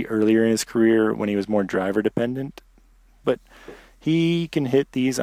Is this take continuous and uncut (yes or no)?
no